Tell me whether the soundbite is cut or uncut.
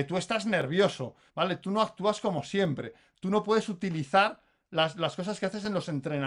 cut